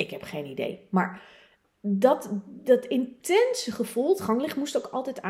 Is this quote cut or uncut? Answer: uncut